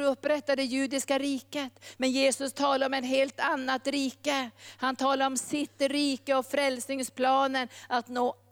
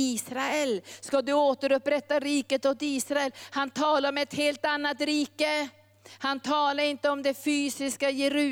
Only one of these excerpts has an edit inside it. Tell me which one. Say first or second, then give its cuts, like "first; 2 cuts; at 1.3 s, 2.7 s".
first; 1 cut; at 2.0 s